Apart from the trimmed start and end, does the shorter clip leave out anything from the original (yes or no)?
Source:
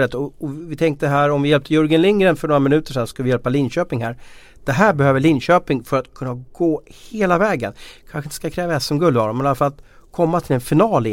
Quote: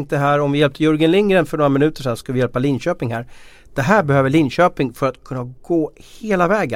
no